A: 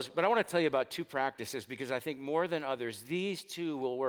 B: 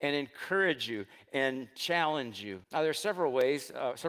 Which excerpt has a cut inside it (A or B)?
B